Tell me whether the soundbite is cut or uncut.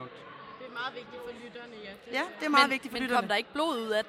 uncut